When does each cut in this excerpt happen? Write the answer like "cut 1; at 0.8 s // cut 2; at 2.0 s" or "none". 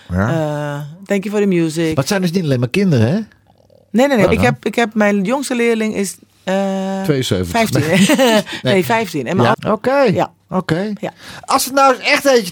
cut 1; at 4.3 s // cut 2; at 9.5 s